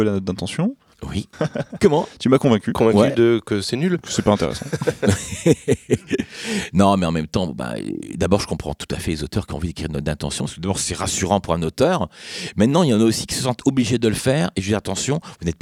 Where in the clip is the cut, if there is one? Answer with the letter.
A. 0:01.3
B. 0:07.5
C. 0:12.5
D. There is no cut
A